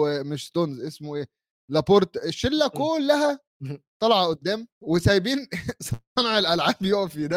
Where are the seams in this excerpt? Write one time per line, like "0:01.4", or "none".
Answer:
0:04.7